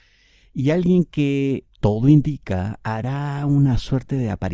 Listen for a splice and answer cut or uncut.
cut